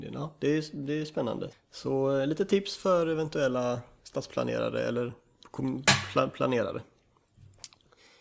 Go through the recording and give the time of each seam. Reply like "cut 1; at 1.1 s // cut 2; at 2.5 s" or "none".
cut 1; at 1.5 s

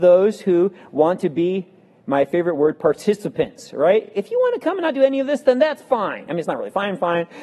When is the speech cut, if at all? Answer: none

